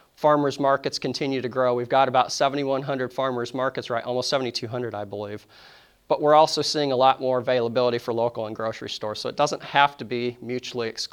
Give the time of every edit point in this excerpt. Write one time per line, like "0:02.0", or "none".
none

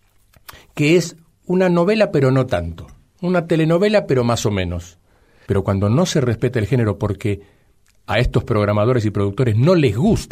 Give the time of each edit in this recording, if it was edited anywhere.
0:05.5

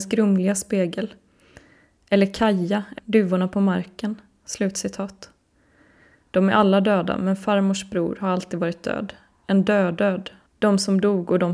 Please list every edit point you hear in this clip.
0:03.0
0:06.2

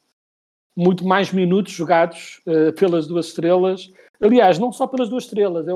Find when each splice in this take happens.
none

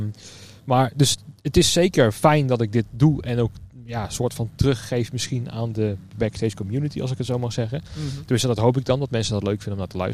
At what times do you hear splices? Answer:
none

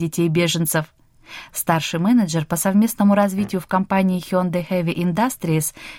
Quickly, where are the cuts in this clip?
none

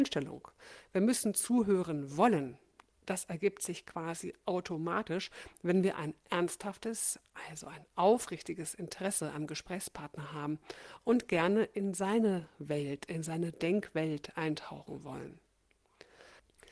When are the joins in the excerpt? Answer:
none

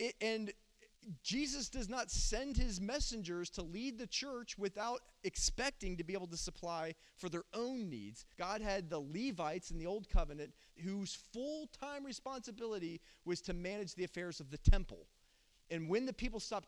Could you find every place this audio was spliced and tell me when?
0:08.3
0:10.8

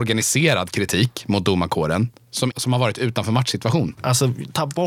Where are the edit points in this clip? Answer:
0:02.5
0:04.0

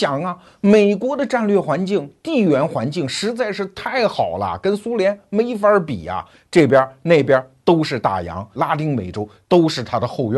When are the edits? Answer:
0:08.5

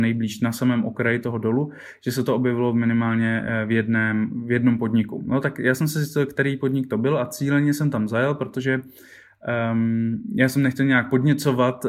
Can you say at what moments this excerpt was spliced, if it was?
none

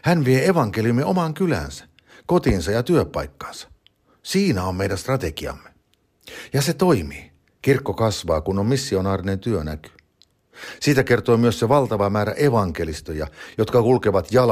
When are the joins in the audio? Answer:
none

